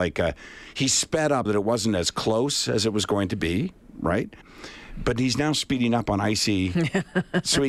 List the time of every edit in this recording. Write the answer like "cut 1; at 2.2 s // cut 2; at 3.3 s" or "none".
cut 1; at 1.4 s // cut 2; at 4.4 s